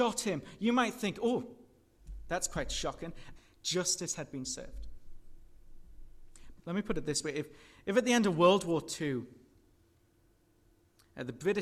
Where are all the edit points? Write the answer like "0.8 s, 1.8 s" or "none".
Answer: 3.4 s, 6.6 s